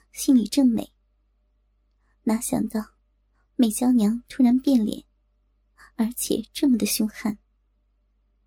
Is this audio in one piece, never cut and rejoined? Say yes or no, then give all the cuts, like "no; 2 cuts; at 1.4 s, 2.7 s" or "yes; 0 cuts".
yes; 0 cuts